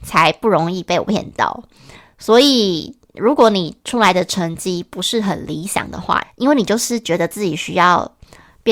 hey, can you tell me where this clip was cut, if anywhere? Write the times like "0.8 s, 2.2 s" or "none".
6.2 s